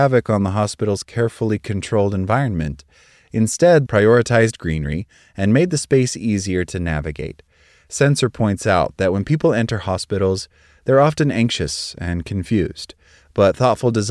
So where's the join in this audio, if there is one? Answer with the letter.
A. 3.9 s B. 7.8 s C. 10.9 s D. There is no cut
A